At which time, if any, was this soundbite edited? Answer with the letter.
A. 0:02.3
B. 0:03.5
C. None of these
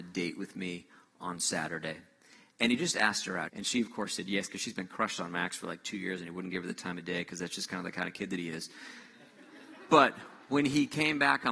B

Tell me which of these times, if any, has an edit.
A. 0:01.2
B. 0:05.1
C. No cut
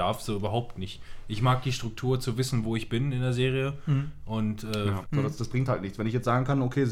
B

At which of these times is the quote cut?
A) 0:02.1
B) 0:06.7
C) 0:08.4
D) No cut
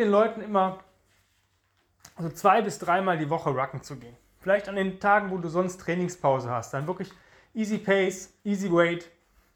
C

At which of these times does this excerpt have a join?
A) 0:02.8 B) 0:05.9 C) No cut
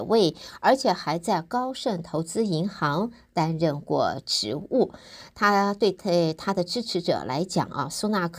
C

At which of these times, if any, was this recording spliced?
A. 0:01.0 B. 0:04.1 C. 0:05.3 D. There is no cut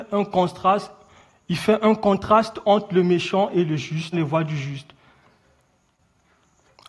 B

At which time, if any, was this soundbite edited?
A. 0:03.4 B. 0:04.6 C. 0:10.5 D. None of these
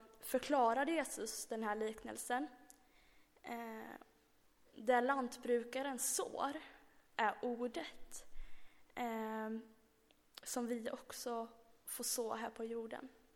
B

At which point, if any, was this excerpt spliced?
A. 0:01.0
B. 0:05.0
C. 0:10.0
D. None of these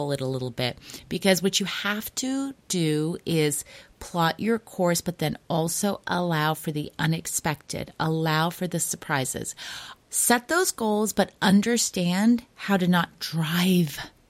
C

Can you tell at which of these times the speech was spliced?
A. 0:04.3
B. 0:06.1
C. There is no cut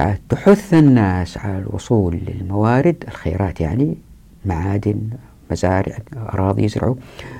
B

